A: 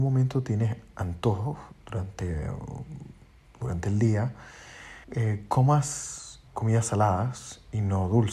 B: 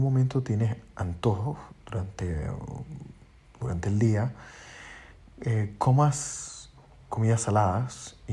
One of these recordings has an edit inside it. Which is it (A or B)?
A